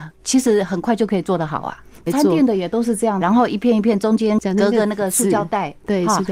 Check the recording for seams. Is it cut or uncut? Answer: cut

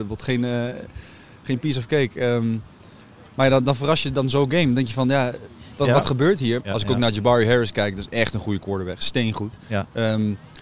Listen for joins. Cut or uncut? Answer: cut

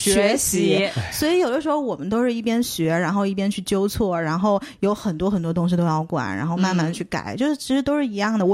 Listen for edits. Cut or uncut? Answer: uncut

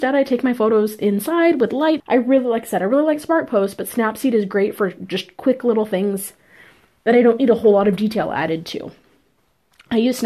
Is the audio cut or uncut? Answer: cut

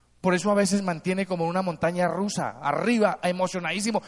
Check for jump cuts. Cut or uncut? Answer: cut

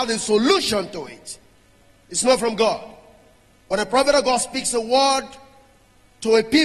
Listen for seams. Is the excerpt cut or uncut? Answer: cut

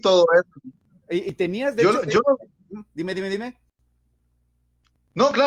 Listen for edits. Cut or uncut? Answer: uncut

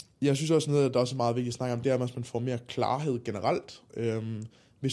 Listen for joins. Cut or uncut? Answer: uncut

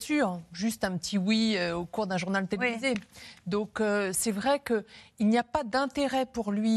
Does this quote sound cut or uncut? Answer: uncut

